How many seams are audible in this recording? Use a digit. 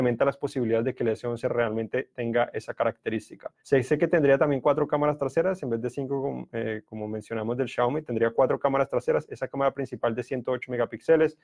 1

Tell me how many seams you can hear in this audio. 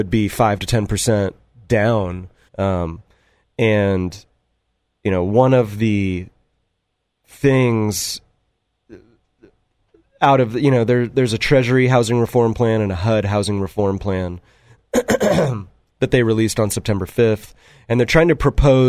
1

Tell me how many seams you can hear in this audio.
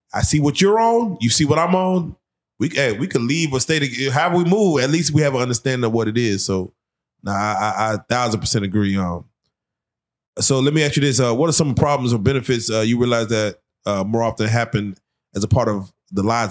0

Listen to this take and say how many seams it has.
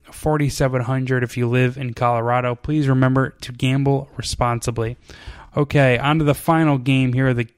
0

